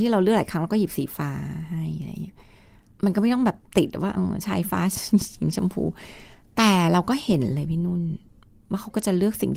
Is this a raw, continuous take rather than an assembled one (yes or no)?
yes